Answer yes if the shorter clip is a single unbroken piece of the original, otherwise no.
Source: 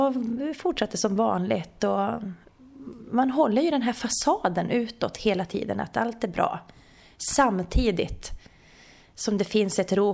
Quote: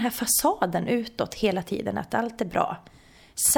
yes